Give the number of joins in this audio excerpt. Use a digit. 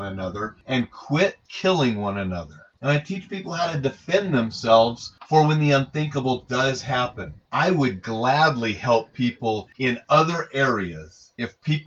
2